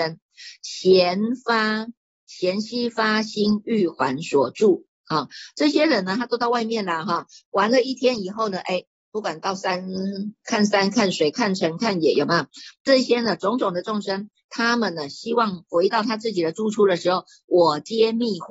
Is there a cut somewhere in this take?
no; 0 cuts

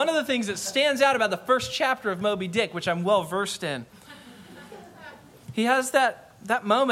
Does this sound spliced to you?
no; 0 cuts

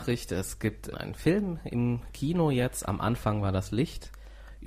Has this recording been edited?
yes; 1 cut; at 0.9 s

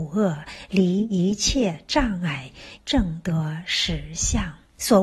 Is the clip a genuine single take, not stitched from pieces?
no; 1 cut; at 2.8 s

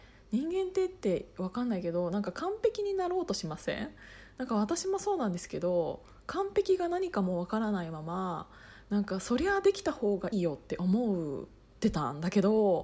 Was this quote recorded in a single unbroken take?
no; 1 cut; at 10.3 s

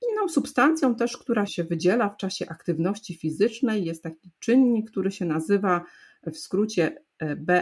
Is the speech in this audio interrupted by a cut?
yes; 1 cut; at 1.5 s

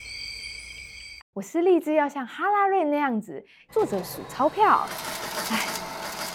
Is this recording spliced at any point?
yes; 2 cuts; at 1.2 s, 3.7 s

